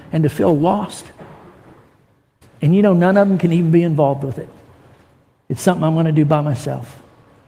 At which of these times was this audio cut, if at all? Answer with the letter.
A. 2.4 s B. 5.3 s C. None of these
A